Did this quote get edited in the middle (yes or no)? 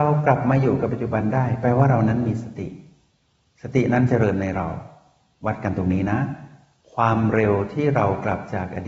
no